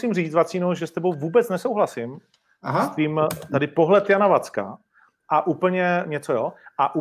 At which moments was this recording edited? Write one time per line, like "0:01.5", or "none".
0:05.2